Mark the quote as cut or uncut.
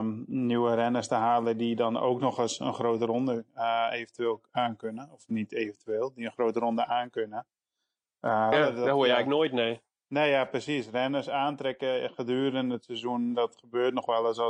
cut